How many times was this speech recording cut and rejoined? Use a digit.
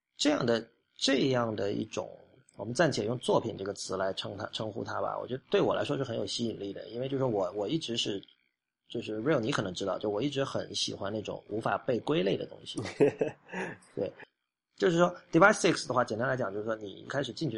0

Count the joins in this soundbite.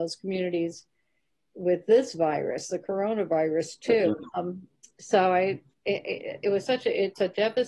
1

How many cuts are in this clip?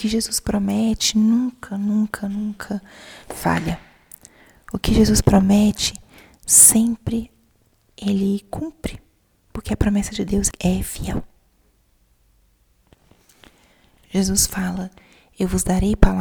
1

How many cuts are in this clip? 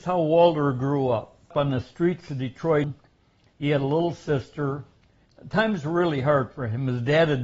0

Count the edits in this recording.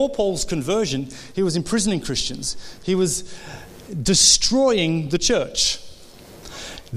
2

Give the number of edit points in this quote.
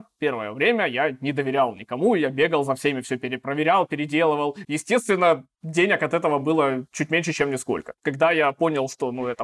1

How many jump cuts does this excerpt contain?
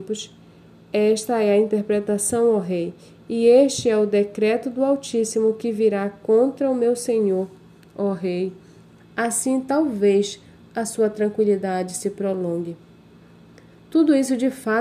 1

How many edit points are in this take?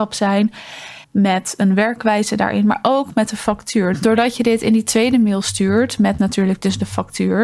2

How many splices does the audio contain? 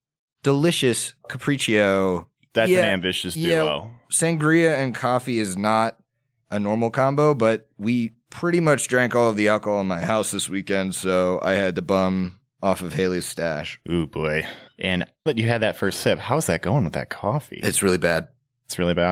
1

